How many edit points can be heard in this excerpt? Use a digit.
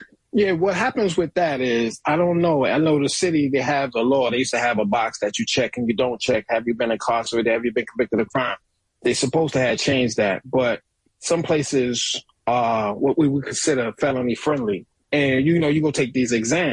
1